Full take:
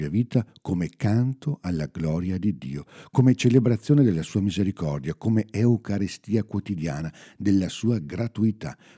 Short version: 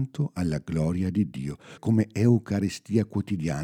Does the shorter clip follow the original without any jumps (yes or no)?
no